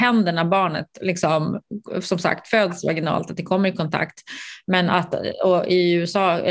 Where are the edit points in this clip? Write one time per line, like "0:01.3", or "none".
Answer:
none